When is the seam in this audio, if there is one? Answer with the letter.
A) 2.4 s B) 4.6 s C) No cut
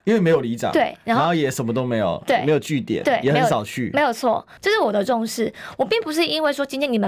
B